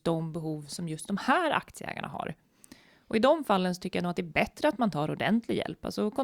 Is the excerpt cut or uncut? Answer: uncut